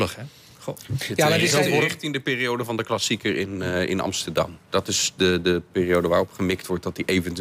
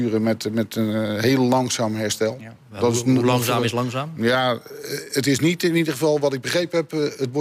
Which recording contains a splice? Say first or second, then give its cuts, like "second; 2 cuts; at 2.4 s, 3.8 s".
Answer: first; 1 cut; at 4.6 s